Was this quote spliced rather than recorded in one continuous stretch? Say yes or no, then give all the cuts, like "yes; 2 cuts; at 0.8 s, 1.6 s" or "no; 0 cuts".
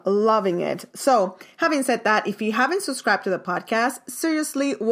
no; 0 cuts